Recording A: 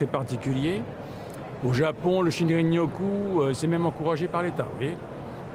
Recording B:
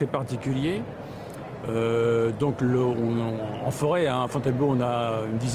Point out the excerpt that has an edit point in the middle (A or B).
A